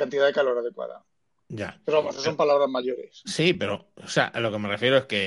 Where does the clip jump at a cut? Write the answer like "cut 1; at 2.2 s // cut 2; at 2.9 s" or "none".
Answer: none